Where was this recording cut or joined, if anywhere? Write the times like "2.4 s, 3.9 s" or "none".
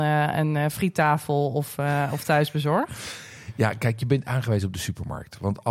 none

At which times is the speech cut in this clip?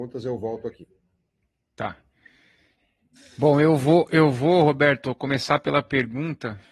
none

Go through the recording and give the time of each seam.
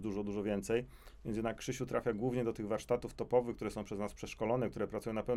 none

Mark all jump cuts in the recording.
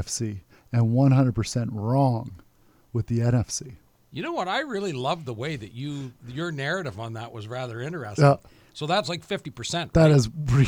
none

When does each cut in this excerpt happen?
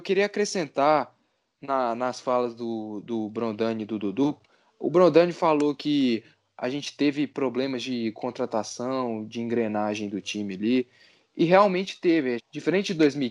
12.4 s

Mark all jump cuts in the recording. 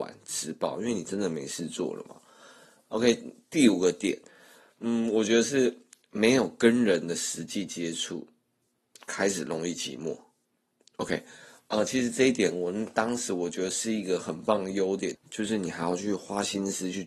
15.1 s

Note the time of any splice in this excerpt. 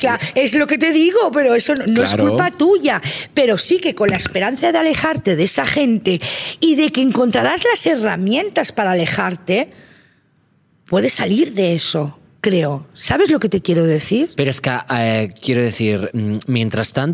none

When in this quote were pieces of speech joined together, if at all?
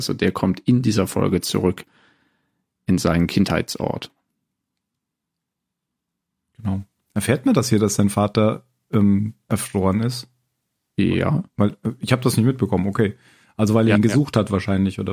none

